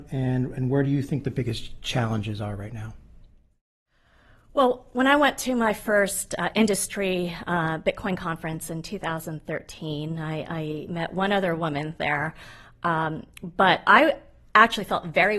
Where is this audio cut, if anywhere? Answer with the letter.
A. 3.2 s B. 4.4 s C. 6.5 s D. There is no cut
D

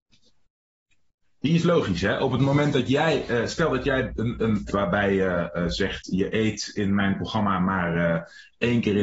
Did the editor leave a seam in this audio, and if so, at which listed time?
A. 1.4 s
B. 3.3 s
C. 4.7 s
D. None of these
C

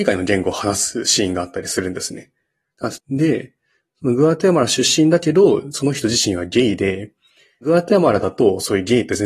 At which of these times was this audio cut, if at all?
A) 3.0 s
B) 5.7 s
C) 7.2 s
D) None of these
A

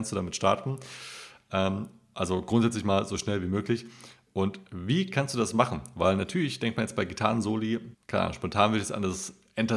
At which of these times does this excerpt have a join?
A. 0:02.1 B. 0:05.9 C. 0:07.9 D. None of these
C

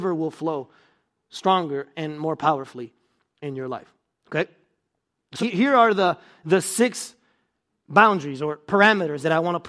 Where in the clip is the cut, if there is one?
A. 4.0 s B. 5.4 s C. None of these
B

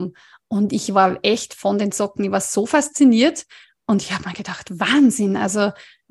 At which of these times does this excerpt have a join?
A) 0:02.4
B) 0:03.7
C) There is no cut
C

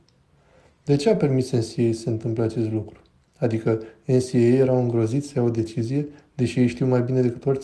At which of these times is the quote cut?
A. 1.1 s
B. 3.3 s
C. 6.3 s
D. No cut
B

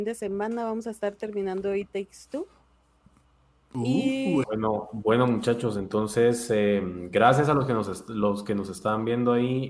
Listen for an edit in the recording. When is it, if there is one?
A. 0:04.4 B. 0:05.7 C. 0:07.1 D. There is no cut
A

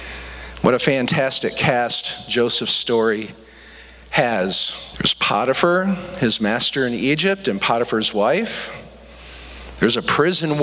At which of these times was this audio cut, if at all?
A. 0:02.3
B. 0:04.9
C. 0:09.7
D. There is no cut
B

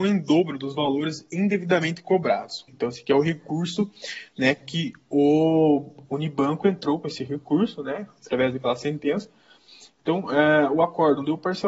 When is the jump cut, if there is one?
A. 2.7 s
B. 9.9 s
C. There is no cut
A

